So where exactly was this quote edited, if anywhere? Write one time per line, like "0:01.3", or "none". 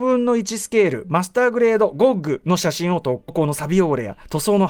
0:03.3